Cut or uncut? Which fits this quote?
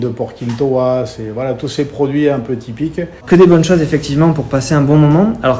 cut